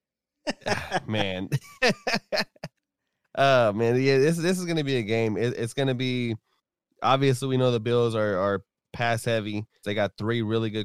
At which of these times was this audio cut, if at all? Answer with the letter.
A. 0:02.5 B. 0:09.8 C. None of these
B